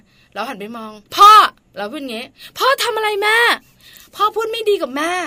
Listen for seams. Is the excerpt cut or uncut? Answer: cut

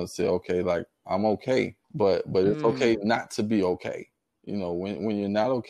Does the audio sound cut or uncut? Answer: cut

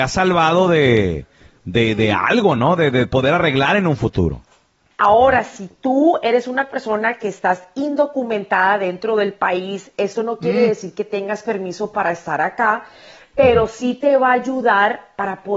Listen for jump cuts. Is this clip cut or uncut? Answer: cut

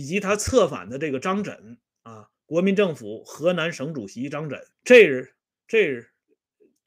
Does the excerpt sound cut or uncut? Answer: cut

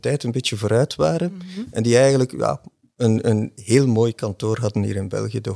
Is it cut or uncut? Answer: uncut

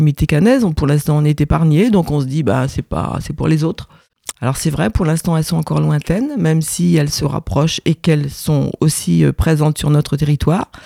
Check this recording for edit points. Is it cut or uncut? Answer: cut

